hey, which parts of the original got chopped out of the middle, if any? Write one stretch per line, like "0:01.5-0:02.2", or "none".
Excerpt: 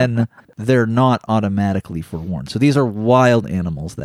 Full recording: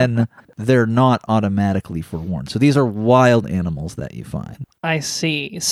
none